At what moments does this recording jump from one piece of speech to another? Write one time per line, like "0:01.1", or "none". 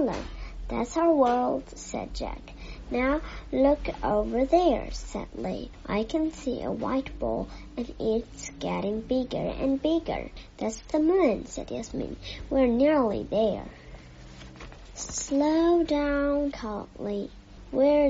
0:16.5

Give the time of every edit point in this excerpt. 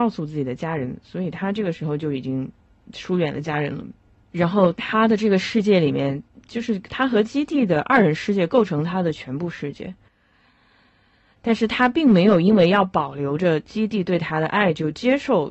none

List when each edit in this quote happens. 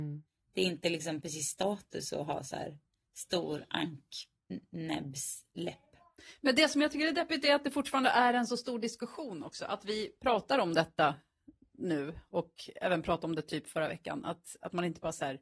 none

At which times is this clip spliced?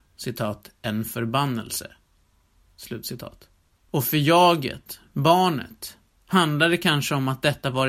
none

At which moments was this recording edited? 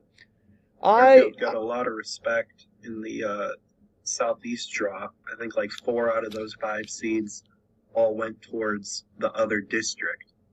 0:05.2

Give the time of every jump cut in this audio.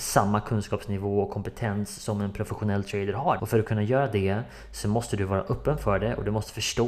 0:03.4

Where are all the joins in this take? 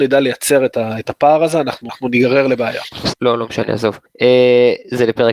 0:03.1

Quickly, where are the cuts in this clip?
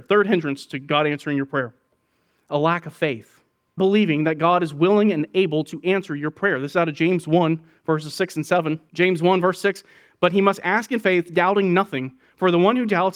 none

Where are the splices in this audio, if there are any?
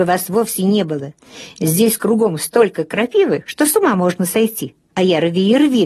0:04.9

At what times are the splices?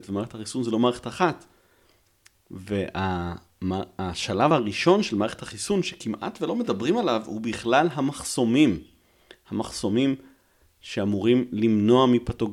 none

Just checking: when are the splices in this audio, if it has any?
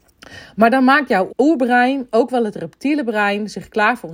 0:01.3

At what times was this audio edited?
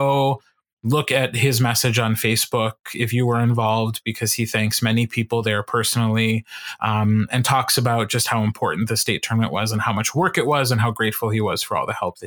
none

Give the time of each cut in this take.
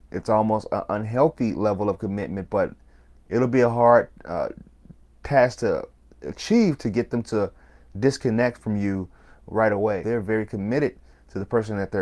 0:10.0

